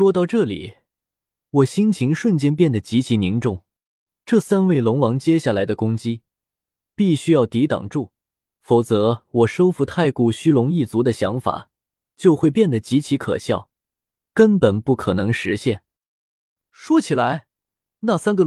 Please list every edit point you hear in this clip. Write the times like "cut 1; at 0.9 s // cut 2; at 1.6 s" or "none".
none